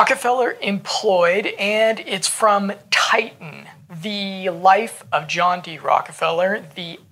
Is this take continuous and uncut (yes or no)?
yes